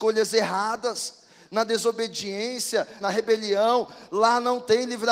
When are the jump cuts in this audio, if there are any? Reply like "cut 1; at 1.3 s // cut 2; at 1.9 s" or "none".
cut 1; at 3.0 s